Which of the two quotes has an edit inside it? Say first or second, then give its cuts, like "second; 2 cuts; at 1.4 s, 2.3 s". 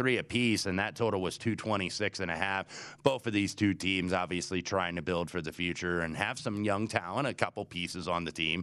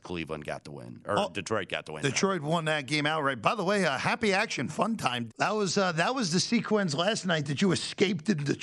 second; 1 cut; at 5.3 s